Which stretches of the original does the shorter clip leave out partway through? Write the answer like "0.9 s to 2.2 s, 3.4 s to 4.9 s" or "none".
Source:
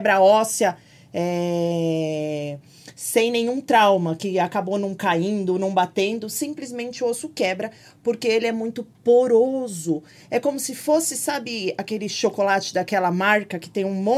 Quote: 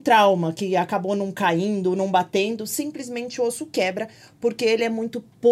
none